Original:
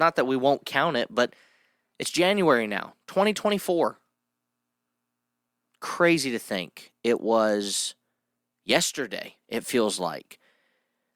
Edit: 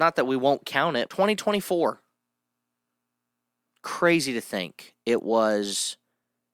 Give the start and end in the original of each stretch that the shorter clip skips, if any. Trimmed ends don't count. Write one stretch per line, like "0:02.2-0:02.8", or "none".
0:01.1-0:03.1